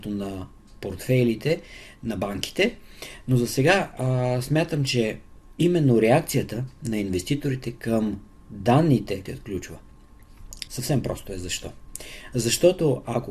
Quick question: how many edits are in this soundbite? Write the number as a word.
two